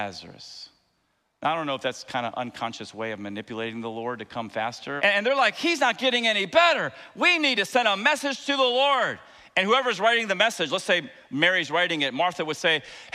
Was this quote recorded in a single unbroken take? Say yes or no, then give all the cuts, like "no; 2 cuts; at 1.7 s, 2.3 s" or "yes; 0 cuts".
no; 1 cut; at 5.0 s